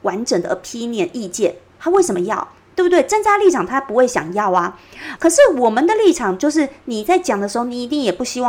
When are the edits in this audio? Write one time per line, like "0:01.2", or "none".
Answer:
0:05.2